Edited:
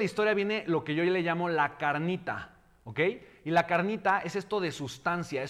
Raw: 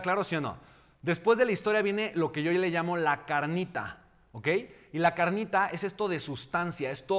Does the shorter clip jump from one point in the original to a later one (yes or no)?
no